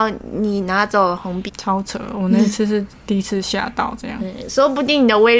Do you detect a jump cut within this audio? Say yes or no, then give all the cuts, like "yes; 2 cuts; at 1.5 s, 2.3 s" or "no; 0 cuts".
yes; 1 cut; at 1.5 s